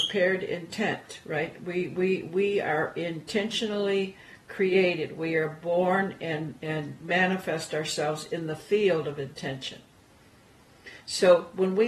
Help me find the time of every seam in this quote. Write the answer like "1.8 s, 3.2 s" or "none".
none